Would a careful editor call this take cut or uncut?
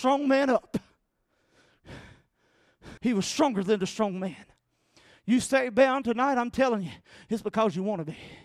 cut